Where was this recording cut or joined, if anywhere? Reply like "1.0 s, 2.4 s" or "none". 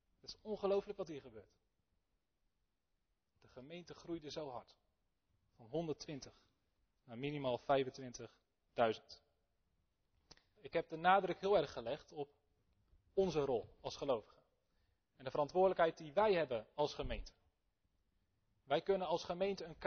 10.5 s